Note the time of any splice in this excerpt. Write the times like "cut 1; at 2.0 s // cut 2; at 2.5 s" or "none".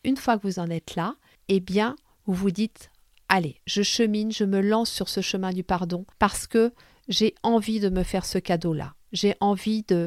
cut 1; at 1.4 s // cut 2; at 6.1 s